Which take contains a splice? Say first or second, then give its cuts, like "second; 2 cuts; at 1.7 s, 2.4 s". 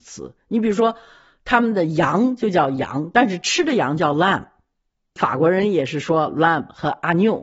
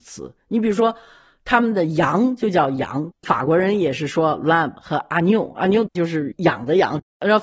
second; 1 cut; at 3.1 s